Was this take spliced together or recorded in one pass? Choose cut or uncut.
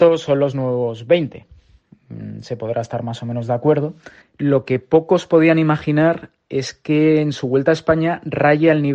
cut